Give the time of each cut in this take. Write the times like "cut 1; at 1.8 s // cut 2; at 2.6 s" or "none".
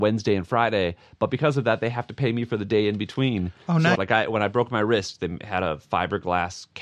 cut 1; at 3.9 s